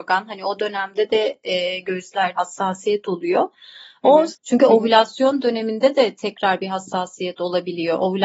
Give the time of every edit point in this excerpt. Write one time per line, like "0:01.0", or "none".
0:02.3
0:04.3